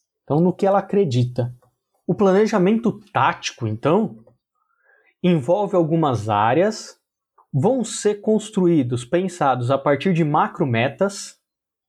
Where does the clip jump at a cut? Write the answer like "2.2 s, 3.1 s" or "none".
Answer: none